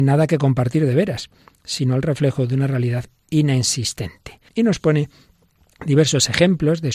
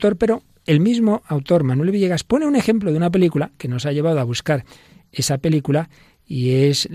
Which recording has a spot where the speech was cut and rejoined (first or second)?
first